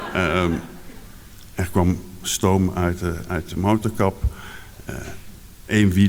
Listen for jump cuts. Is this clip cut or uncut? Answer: uncut